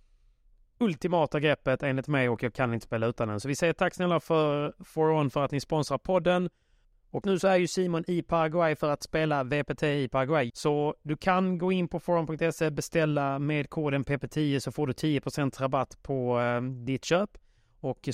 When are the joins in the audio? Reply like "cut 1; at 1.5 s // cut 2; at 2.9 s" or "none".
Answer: cut 1; at 7.2 s // cut 2; at 10.5 s